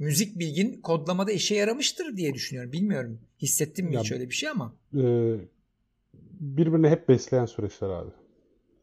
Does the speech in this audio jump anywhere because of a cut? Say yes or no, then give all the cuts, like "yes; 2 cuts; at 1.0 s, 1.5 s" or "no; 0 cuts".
yes; 1 cut; at 4.8 s